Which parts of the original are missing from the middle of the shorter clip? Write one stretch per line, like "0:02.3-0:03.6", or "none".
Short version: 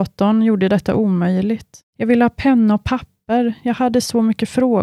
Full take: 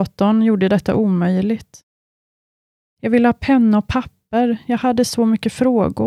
0:01.9-0:02.9